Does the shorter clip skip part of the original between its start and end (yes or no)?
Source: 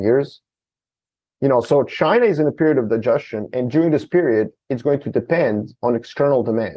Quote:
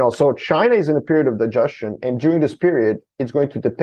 no